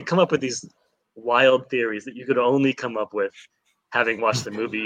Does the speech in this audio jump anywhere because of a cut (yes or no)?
no